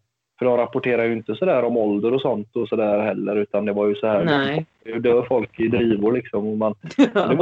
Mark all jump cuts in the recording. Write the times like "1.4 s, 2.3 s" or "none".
none

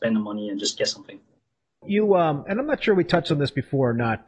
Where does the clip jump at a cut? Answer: 1.8 s

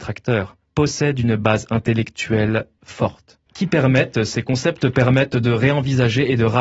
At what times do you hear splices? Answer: 3.5 s

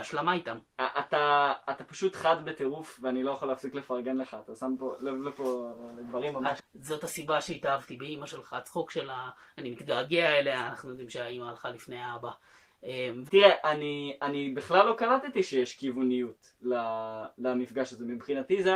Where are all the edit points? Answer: 6.6 s, 13.3 s

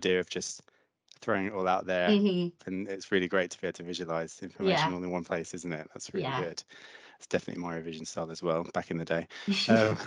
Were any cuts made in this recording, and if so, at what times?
2.6 s

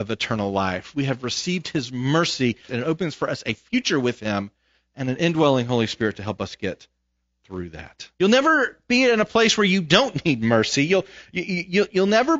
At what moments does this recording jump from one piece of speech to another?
2.7 s, 8.1 s

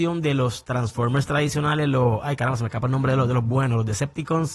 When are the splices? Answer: none

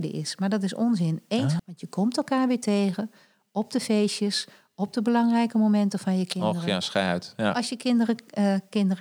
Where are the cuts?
1.6 s

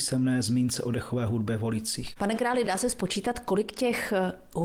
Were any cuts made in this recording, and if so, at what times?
none

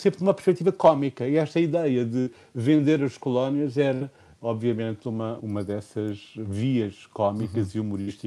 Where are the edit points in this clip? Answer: 5.4 s

